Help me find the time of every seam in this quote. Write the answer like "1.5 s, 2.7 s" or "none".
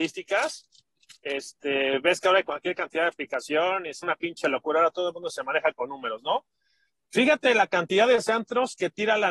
4.0 s